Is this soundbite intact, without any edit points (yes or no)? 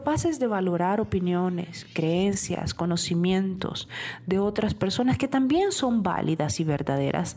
yes